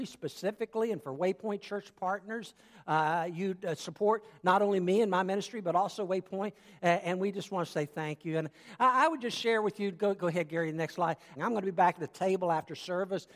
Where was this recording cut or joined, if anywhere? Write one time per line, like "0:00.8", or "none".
0:11.4